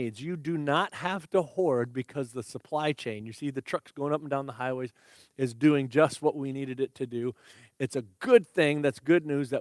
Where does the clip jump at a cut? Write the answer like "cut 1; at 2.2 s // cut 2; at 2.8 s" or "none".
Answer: none